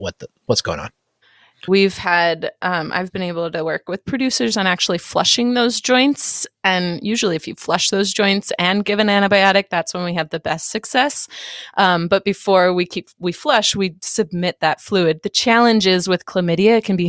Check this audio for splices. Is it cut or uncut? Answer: cut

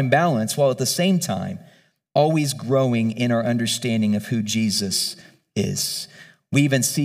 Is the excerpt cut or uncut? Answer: uncut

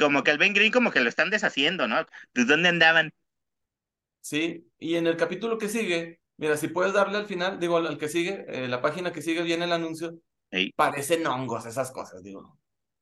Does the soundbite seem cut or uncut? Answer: cut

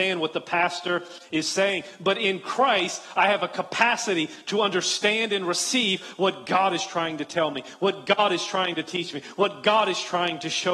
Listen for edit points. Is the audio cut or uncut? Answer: uncut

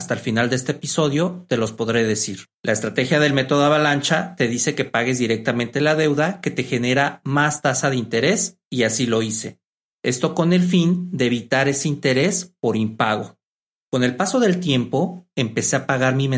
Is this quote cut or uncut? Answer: uncut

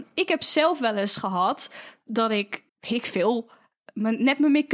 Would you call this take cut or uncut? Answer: cut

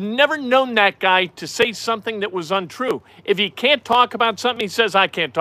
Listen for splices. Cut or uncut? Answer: uncut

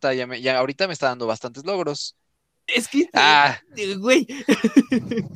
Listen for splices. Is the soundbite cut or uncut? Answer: cut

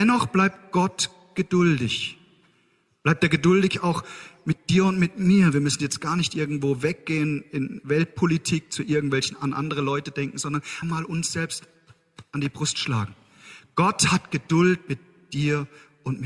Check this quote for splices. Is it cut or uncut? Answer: cut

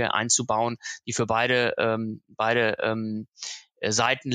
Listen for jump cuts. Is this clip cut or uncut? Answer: uncut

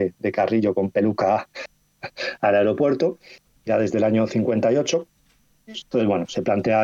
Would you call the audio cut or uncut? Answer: cut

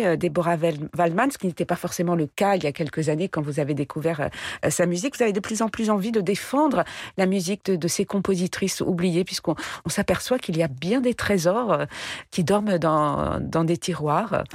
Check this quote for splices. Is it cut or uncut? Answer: uncut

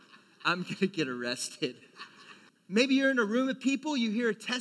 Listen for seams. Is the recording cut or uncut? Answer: cut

